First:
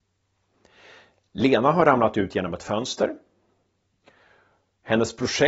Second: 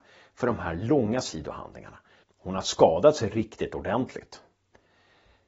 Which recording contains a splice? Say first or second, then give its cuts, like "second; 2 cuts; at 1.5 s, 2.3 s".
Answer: second; 1 cut; at 2.2 s